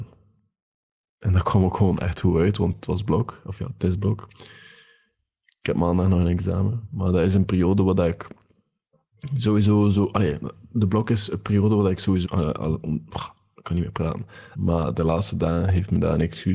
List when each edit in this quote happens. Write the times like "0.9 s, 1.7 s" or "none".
12.2 s, 14.5 s